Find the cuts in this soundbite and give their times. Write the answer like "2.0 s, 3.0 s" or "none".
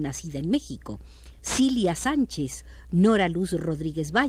none